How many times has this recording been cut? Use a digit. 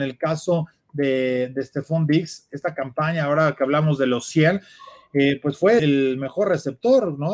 1